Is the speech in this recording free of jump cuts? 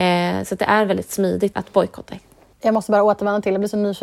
no; 1 cut; at 1.5 s

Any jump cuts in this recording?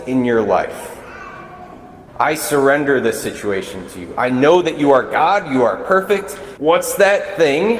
yes; 2 cuts; at 2.1 s, 6.6 s

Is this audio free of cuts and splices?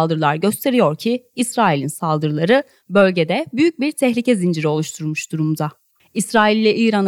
no; 1 cut; at 6.0 s

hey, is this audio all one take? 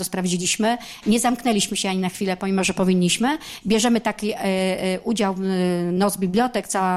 no; 1 cut; at 3.6 s

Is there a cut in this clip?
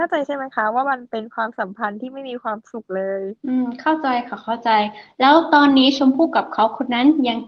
yes; 1 cut; at 3.4 s

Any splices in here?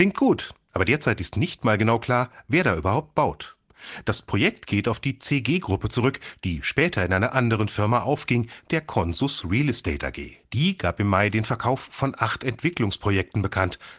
yes; 1 cut; at 10.4 s

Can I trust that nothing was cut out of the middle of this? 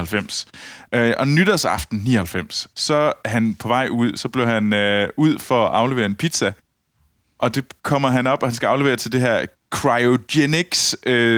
yes; 0 cuts

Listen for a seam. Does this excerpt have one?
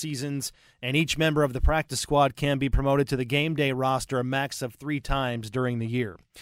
no; 0 cuts

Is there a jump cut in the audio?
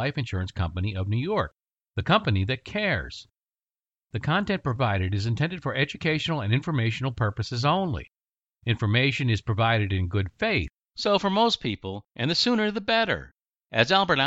yes; 2 cuts; at 10.9 s, 12.1 s

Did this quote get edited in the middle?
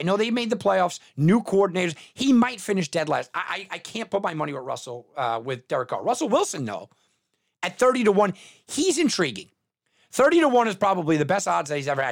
no; 0 cuts

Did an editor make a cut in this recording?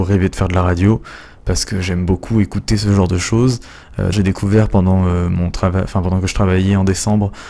yes; 1 cut; at 4.1 s

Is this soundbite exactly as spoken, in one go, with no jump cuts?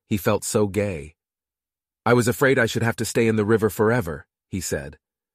yes; 0 cuts

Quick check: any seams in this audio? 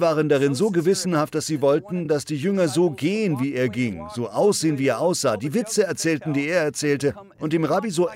no; 0 cuts

